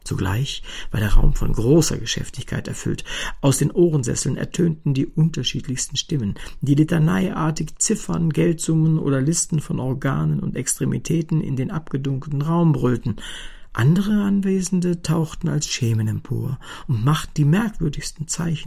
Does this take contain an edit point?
no; 0 cuts

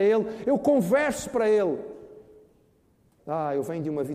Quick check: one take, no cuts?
no; 1 cut; at 3.2 s

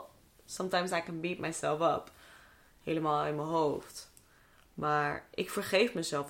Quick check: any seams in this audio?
no; 0 cuts

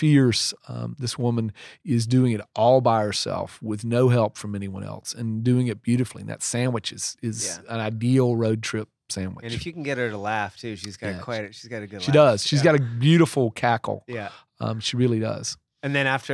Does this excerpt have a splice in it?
no; 0 cuts

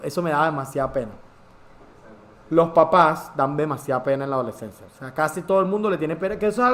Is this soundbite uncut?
no; 1 cut; at 4.9 s

